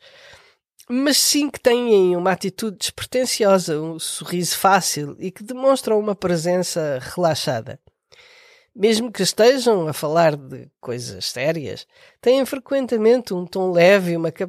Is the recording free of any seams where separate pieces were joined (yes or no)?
yes